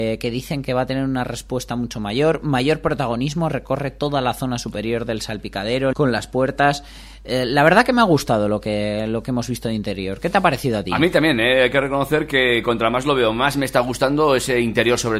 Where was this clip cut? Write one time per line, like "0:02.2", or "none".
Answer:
0:05.9